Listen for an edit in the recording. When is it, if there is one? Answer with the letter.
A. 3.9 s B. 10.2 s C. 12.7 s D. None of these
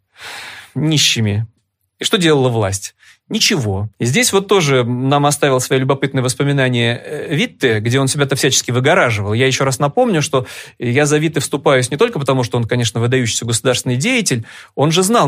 A